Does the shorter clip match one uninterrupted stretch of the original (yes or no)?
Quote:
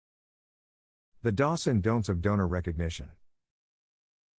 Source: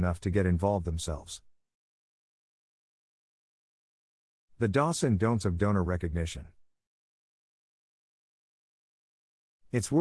yes